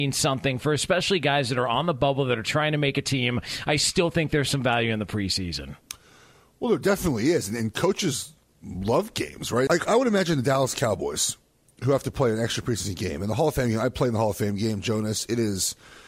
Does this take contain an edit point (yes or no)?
yes